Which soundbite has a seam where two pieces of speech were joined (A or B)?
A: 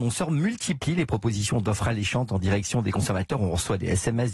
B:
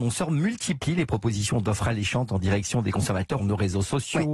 B